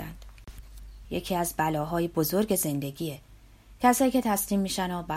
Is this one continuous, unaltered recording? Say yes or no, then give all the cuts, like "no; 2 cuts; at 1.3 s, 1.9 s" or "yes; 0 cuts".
no; 1 cut; at 1.0 s